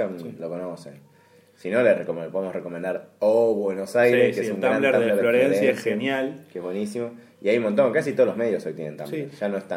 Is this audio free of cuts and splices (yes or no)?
yes